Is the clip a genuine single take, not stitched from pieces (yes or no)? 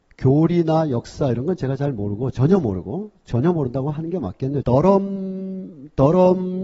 no